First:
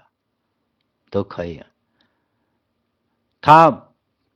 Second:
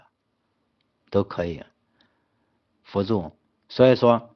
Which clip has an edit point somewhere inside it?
second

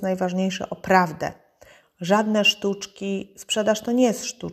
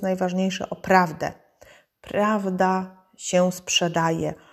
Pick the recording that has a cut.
first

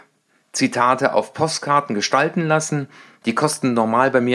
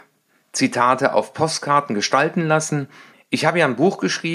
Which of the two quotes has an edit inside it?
second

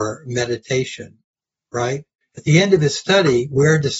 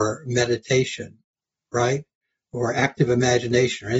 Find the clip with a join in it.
first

